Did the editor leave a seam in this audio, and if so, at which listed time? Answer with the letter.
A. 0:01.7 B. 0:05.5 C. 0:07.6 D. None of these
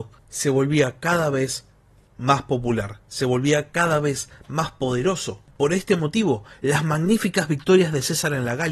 B